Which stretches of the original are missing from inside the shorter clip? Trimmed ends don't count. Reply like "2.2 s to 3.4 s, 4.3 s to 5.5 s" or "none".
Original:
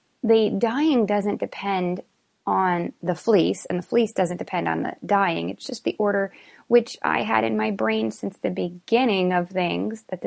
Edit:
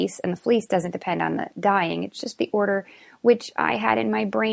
none